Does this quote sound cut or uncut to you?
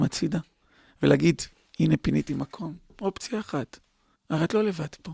cut